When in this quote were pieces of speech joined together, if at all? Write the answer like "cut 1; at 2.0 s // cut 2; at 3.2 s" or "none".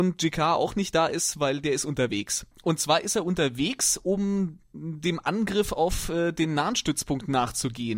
cut 1; at 2.5 s